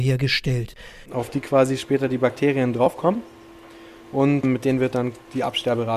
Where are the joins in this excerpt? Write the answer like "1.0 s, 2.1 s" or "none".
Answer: 1.1 s